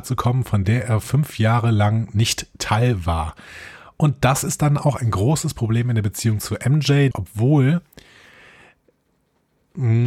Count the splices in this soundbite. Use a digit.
1